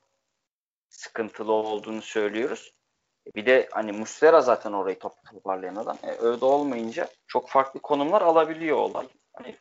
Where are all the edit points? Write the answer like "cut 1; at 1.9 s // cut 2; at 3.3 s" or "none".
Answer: cut 1; at 7.2 s